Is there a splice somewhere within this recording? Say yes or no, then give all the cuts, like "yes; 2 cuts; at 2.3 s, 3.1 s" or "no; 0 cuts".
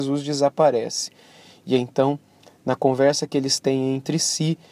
no; 0 cuts